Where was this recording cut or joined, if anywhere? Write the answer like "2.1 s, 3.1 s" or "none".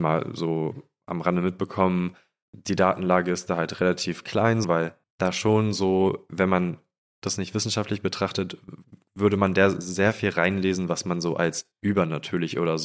4.6 s, 6.3 s

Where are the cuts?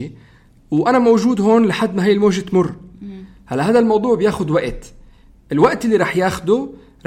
none

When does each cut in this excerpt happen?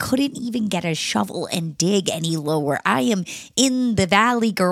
none

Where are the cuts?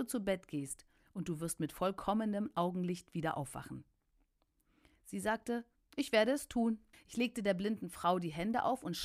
6.9 s

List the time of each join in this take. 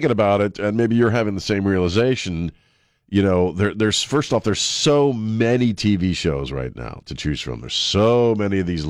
none

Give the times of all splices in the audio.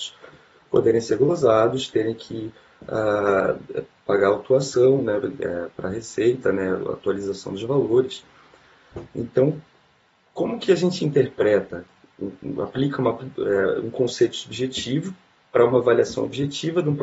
none

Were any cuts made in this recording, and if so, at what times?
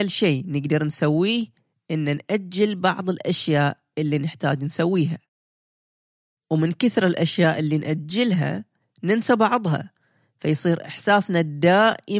none

